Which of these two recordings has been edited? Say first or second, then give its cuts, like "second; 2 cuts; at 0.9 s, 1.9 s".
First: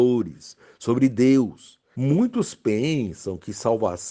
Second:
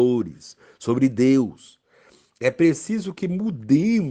first; 1 cut; at 1.9 s